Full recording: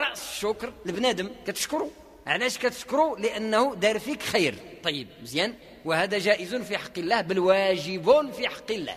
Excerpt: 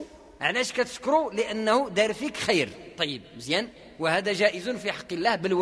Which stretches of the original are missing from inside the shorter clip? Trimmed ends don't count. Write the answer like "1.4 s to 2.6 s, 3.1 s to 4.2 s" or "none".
none